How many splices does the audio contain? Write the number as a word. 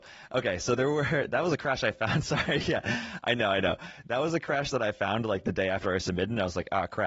zero